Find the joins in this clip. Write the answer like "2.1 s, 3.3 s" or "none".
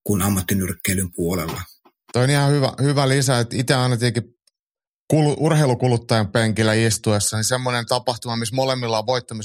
2.1 s